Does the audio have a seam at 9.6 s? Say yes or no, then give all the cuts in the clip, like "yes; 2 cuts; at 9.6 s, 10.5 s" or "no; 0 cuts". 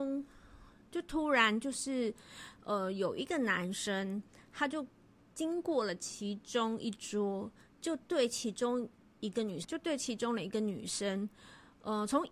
yes; 1 cut; at 9.6 s